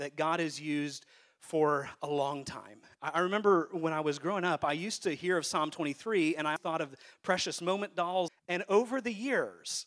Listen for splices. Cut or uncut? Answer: cut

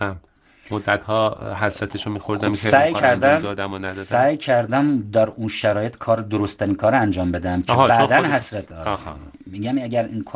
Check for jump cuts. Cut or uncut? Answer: uncut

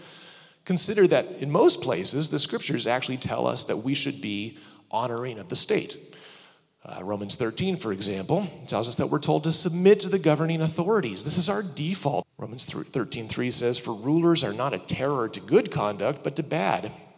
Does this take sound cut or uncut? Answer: cut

